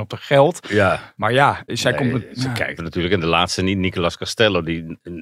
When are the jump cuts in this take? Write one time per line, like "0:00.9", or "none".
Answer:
0:01.7
0:02.8